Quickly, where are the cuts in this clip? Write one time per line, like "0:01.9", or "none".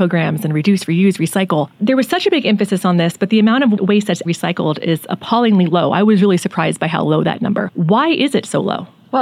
0:04.2